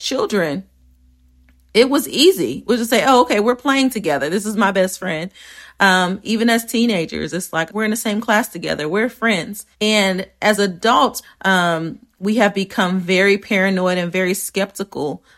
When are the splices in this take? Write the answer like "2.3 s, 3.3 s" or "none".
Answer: 7.7 s, 9.7 s, 11.2 s